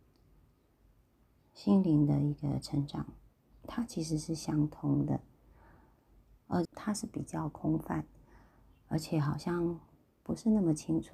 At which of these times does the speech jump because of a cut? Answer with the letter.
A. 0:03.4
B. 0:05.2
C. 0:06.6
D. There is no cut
C